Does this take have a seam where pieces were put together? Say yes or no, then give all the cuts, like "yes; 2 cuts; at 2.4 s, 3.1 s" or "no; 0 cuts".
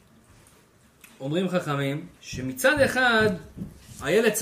yes; 1 cut; at 2.2 s